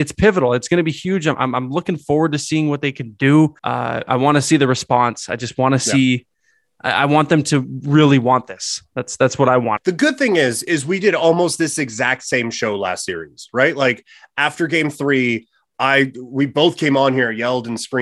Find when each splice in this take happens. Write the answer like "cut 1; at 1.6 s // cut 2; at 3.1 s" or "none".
cut 1; at 3.6 s // cut 2; at 9.8 s